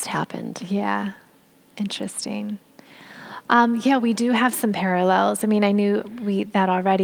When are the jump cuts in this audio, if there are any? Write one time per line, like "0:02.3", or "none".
none